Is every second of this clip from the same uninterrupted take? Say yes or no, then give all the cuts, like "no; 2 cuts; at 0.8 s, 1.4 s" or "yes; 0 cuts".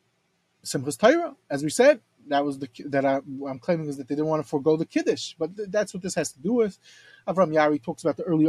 yes; 0 cuts